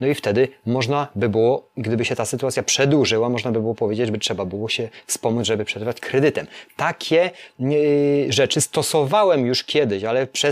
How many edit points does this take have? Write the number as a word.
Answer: zero